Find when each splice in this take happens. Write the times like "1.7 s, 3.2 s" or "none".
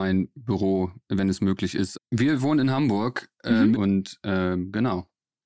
1.9 s, 3.7 s